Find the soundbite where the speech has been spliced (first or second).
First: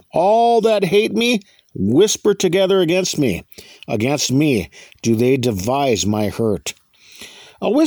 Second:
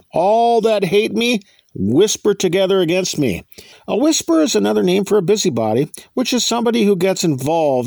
second